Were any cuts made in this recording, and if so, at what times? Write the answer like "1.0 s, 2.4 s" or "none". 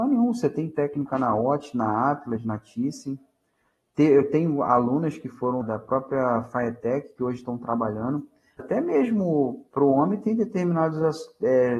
5.6 s, 8.6 s